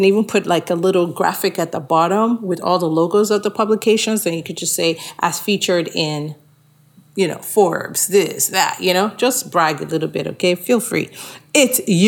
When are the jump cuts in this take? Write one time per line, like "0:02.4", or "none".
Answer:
none